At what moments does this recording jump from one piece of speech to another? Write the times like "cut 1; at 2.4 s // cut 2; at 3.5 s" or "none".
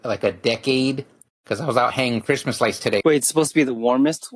cut 1; at 3.0 s